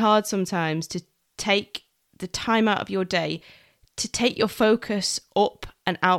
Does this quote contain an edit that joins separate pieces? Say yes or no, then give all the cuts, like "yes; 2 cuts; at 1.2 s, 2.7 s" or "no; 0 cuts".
no; 0 cuts